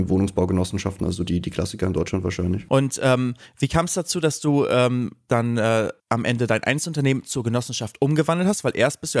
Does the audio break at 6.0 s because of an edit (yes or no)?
yes